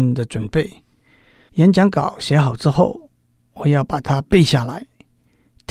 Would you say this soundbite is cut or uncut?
cut